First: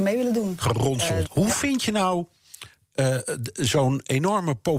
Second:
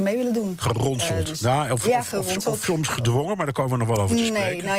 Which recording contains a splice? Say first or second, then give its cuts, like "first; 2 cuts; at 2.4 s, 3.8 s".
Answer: first; 1 cut; at 1.3 s